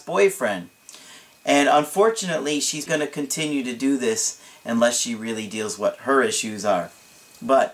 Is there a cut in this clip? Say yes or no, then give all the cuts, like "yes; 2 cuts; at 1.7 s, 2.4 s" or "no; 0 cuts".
yes; 1 cut; at 2.9 s